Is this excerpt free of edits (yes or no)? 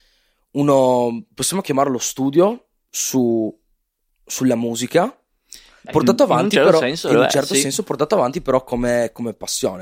yes